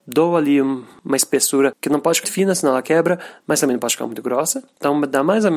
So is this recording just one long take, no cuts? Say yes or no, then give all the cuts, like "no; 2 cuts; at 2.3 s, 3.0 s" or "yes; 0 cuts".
no; 1 cut; at 2.2 s